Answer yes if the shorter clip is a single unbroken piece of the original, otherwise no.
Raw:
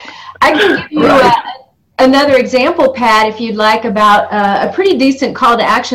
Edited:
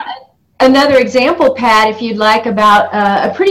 yes